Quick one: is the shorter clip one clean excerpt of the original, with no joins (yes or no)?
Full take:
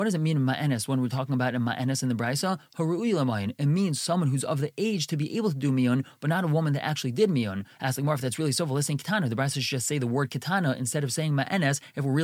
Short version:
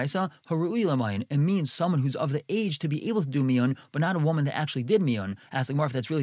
yes